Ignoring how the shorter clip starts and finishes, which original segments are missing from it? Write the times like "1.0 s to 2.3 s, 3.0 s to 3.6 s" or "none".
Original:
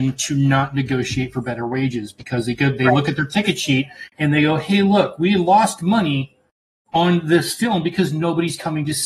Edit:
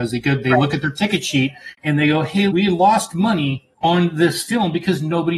4.8 s to 5.2 s, 6.4 s to 6.8 s